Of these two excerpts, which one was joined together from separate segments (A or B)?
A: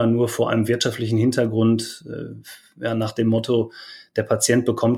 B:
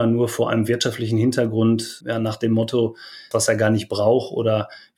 B